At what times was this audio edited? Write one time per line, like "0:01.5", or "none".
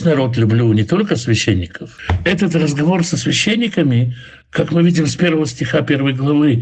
none